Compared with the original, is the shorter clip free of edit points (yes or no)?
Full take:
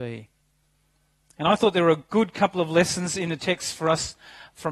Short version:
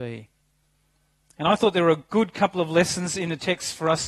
yes